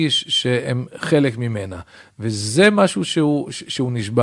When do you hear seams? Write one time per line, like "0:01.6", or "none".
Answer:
none

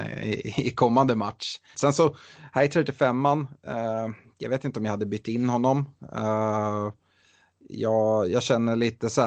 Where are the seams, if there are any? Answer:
0:01.7

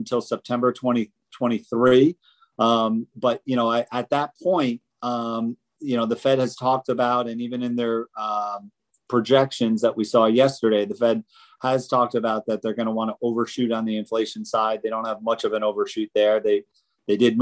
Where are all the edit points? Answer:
none

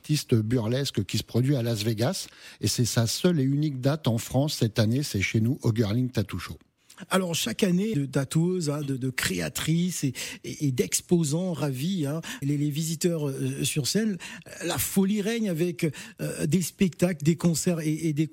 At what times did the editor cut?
0:07.9
0:12.4

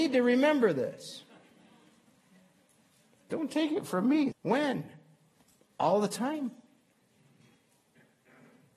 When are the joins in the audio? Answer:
0:04.3

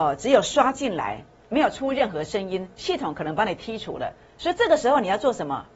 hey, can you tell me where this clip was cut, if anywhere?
0:01.4
0:04.3

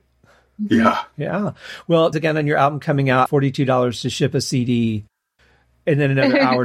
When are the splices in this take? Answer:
0:02.1
0:03.3

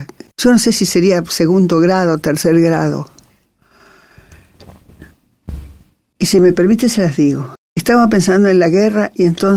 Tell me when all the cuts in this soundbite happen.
0:07.6

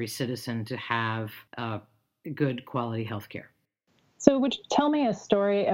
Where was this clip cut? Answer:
0:01.5

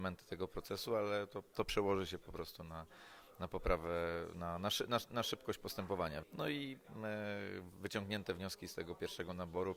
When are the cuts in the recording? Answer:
0:06.2

